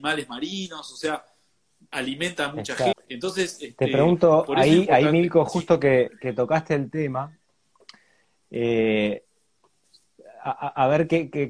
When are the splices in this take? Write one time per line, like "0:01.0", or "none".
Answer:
0:02.9